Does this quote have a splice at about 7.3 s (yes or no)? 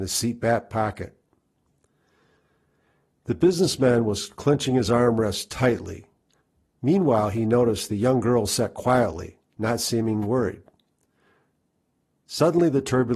no